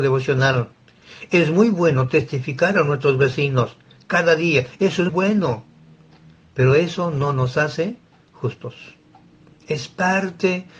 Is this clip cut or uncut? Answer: cut